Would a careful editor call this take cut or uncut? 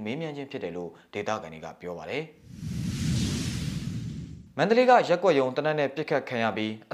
uncut